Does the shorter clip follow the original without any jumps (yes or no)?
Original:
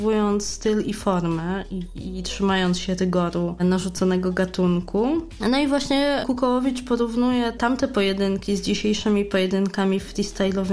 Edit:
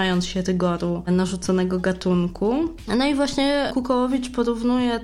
yes